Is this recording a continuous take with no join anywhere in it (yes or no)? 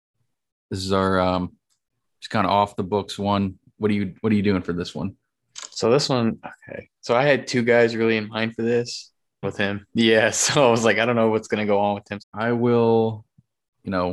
no